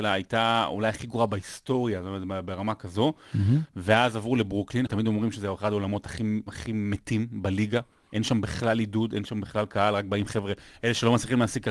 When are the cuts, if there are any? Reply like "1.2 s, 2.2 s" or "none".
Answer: 4.9 s